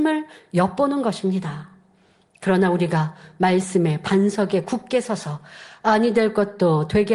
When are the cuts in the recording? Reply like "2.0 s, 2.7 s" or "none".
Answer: none